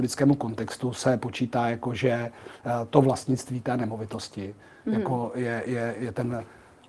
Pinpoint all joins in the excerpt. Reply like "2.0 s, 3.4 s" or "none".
5.9 s